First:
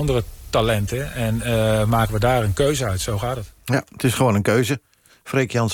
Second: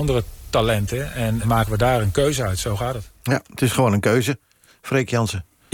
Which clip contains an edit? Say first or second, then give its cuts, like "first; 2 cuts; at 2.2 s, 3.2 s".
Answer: second; 1 cut; at 1.4 s